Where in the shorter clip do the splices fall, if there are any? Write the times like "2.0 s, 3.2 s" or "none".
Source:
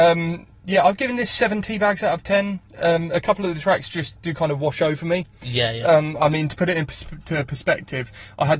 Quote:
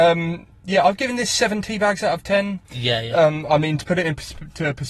2.7 s